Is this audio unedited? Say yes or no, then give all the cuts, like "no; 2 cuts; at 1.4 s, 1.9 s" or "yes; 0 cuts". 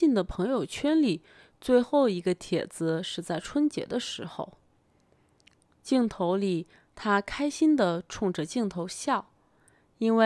yes; 0 cuts